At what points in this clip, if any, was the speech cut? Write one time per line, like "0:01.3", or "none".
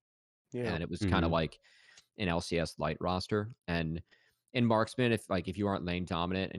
none